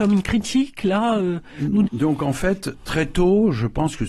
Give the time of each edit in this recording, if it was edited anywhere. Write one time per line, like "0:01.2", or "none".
0:01.8

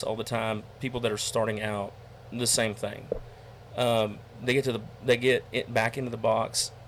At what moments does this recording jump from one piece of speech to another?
none

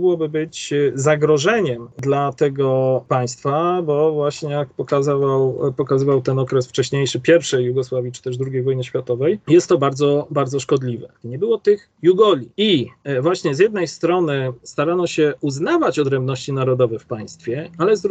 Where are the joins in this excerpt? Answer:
0:11.2
0:12.5

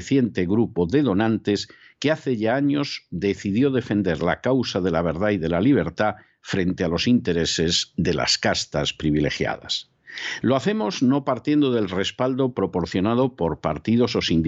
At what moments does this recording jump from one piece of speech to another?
0:10.4

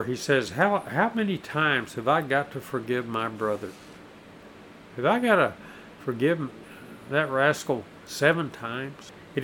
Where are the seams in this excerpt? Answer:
none

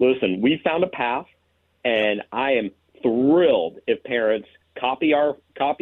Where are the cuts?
none

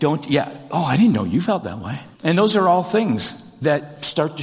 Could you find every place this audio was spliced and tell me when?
0:02.1

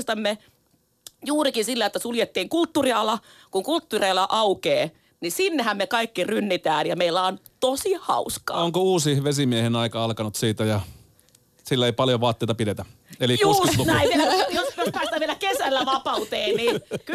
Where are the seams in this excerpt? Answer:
none

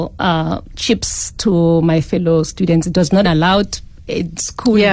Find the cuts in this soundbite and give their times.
0:03.2

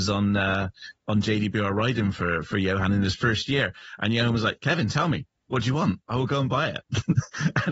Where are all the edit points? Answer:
none

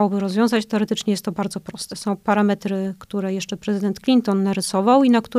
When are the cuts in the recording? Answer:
none

